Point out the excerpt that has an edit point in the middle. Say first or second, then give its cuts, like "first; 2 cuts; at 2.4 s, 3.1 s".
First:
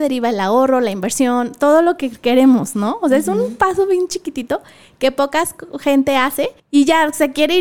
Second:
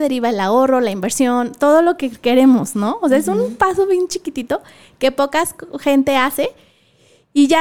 first; 1 cut; at 6.6 s